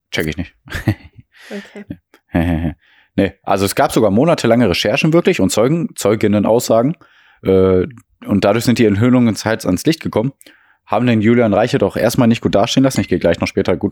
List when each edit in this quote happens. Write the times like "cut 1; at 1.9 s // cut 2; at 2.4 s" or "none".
none

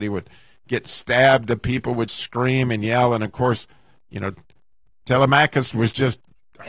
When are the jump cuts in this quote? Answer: cut 1; at 2.1 s

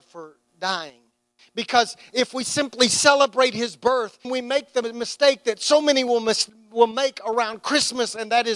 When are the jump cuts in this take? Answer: cut 1; at 1.4 s // cut 2; at 4.2 s

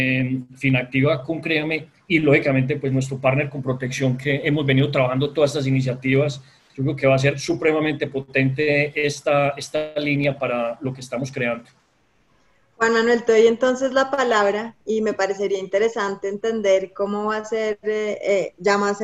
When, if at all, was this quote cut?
none

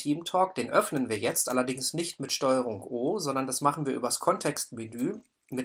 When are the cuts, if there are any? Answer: none

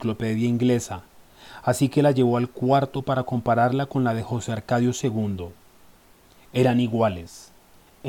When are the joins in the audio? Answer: none

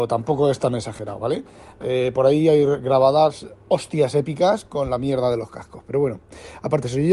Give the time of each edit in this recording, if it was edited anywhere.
none

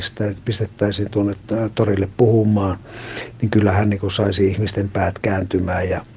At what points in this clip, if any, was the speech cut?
none

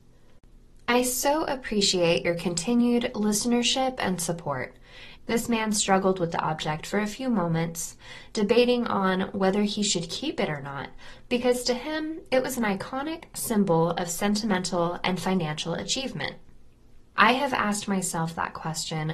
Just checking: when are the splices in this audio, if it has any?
cut 1; at 5.2 s // cut 2; at 17.1 s

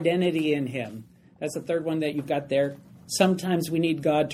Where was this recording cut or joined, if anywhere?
none

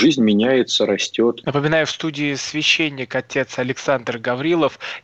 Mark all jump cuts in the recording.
cut 1; at 1.4 s

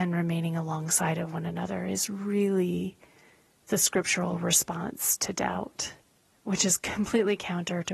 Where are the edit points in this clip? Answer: none

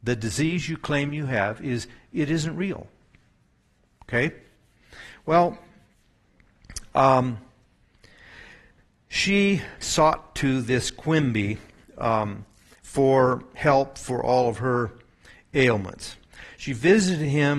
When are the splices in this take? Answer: cut 1; at 9.8 s

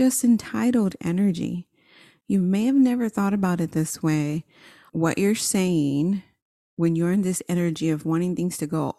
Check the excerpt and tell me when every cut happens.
cut 1; at 4.9 s

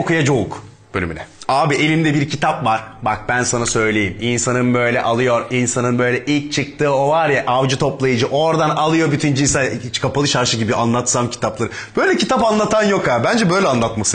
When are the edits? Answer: none

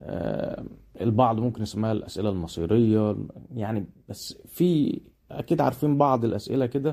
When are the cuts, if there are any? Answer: none

